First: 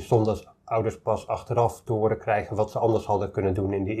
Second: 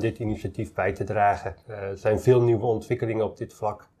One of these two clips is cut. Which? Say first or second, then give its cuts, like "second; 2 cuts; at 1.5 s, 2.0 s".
second; 1 cut; at 1.6 s